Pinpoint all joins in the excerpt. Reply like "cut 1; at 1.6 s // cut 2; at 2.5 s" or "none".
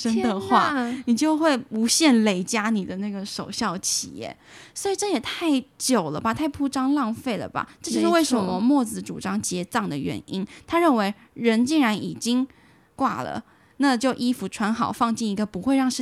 none